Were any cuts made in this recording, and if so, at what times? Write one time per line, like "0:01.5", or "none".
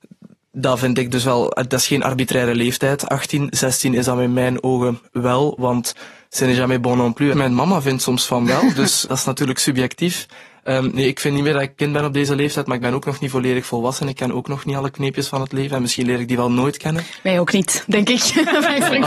0:07.3
0:09.1